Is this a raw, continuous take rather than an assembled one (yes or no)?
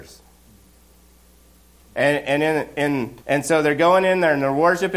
no